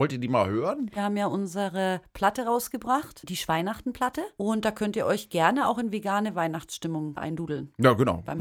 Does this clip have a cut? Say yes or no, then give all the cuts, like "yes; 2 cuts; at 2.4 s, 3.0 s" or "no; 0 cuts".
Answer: yes; 2 cuts; at 1.0 s, 4.3 s